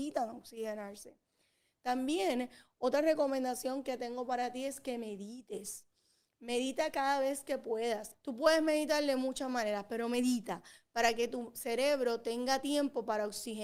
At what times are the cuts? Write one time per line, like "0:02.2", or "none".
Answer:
0:08.1